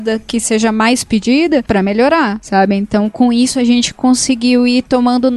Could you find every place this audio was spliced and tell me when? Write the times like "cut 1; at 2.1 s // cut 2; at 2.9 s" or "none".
none